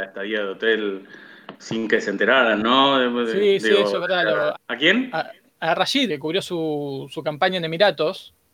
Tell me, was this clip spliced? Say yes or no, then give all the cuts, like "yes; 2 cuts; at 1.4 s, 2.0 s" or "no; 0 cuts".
yes; 2 cuts; at 4.5 s, 6.1 s